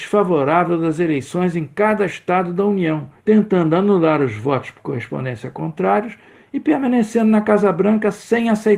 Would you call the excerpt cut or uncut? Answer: cut